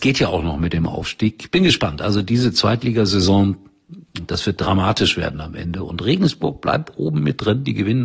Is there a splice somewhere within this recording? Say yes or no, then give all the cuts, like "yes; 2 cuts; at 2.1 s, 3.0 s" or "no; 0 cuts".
no; 0 cuts